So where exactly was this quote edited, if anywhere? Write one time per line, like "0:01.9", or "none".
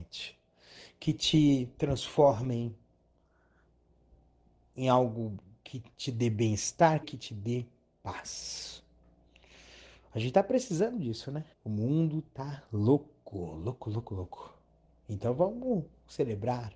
0:07.0
0:11.5

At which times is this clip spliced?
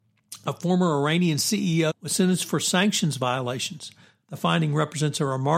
0:01.9
0:04.2

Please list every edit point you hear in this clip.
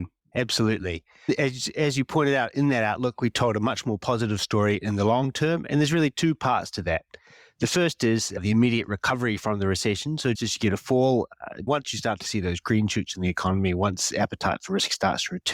0:10.3
0:11.7

